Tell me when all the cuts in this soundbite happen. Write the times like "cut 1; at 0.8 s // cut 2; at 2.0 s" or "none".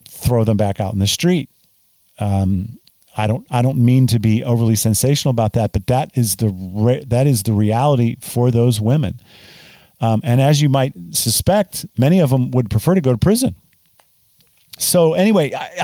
cut 1; at 14.8 s